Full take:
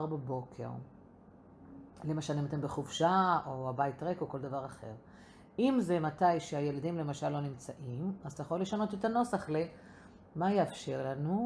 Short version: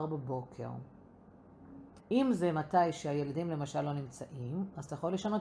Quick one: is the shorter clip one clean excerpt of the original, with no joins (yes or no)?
no